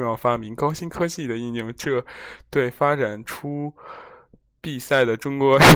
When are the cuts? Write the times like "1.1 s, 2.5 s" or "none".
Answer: none